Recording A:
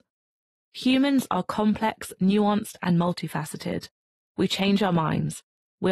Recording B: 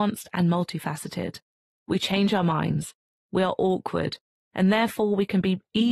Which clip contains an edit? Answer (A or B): B